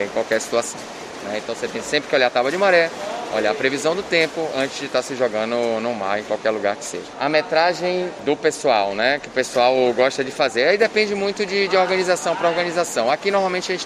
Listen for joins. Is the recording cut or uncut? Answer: uncut